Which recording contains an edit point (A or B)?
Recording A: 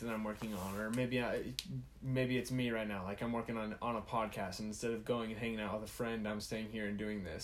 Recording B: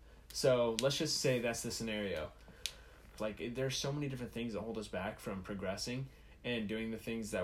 B